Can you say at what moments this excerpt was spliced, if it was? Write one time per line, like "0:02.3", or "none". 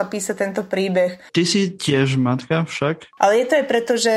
0:01.3
0:03.2